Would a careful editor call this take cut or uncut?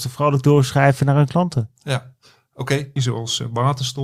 cut